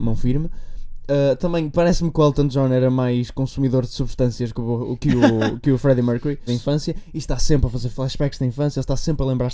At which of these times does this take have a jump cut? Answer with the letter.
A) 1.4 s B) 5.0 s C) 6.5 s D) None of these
C